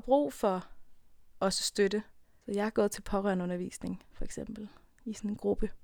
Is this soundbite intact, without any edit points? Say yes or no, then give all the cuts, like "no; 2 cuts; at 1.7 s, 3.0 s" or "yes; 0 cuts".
no; 1 cut; at 2.4 s